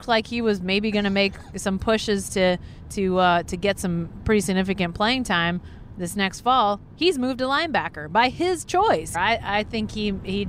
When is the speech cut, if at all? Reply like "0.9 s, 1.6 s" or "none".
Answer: 9.1 s